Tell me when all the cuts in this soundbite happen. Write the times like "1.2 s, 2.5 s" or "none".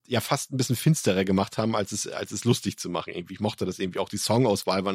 none